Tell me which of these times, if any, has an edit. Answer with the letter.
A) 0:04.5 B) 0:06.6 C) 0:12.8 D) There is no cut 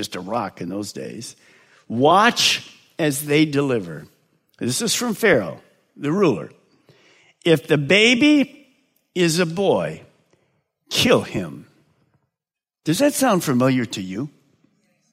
D